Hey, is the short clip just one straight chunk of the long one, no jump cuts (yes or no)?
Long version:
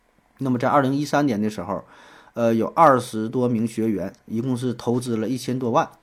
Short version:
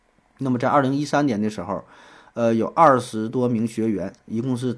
yes